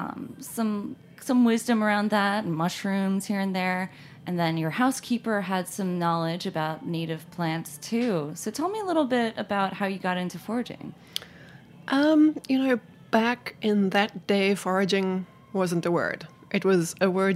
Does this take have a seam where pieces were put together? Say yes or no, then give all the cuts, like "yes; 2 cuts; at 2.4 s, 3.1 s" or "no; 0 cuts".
no; 0 cuts